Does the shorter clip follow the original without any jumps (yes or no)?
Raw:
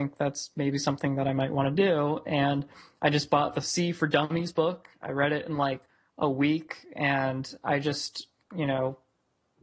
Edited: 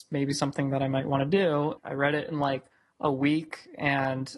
no